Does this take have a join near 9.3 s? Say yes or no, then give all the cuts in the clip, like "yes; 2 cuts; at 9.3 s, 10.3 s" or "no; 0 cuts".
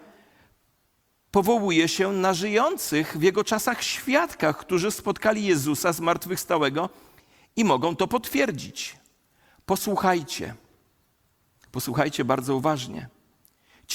no; 0 cuts